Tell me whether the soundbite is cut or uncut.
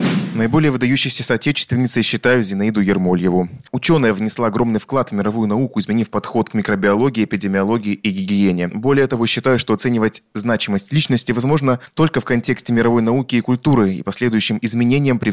uncut